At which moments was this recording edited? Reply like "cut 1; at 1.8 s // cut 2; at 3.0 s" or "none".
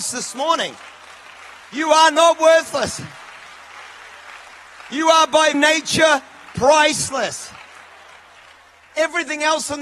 cut 1; at 5.5 s